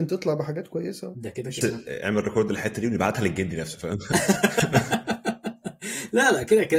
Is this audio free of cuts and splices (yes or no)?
no